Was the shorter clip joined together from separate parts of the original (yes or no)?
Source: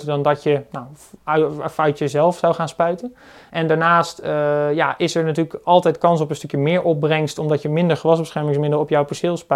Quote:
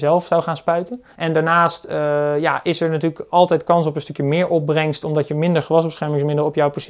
yes